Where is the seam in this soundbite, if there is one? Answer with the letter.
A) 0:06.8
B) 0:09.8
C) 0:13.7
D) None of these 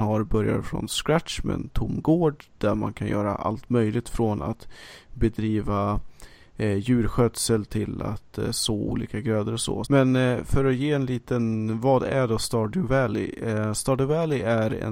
B